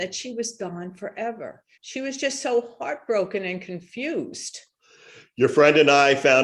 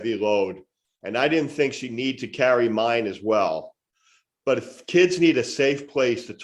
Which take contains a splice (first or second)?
first